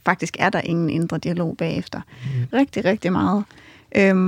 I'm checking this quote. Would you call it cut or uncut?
cut